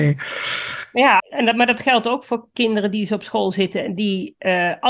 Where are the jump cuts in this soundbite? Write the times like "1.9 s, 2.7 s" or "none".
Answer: 1.2 s